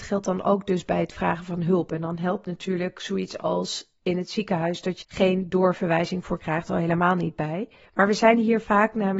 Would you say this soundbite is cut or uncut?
cut